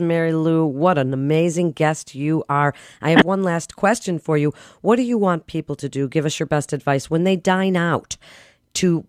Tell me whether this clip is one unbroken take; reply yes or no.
yes